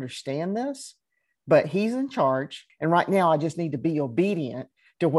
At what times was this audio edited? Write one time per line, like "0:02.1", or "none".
0:02.7